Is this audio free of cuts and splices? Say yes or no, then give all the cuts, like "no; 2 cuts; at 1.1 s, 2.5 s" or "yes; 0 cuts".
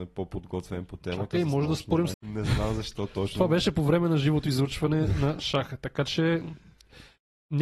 no; 1 cut; at 2.1 s